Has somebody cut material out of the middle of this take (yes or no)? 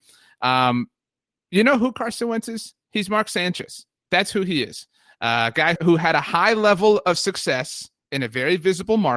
yes